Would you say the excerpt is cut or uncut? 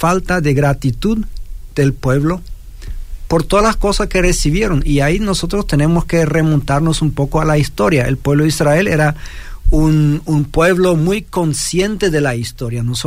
uncut